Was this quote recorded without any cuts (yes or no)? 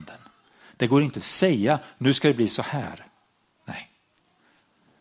yes